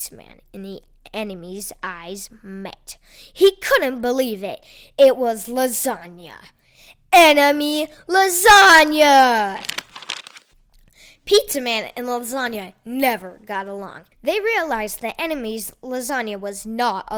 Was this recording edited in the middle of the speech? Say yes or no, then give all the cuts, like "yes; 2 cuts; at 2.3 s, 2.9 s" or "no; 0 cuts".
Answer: yes; 1 cut; at 14.1 s